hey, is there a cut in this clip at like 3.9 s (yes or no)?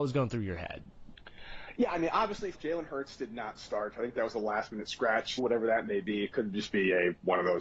no